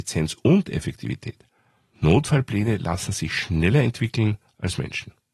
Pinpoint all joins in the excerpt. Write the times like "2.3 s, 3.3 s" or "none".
1.9 s